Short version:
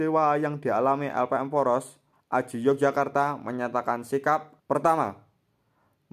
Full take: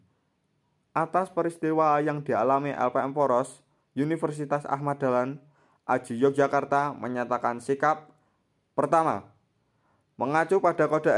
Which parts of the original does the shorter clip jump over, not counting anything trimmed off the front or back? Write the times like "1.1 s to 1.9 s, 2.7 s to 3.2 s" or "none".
3.8 s to 5.7 s, 8.2 s to 8.7 s

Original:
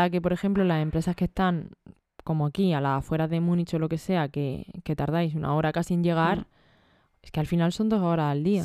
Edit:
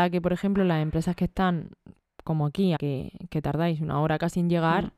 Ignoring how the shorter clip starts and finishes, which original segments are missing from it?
2.8 s to 4.3 s

